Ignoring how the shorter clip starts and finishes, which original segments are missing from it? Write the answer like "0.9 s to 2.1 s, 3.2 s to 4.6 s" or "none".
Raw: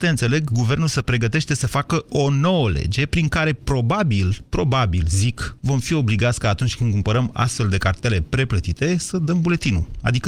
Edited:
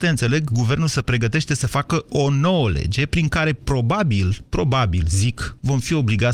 none